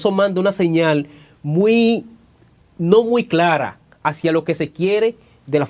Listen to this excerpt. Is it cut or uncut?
uncut